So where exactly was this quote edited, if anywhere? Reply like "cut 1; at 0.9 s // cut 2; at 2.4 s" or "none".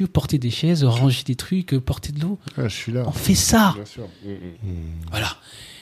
cut 1; at 4.5 s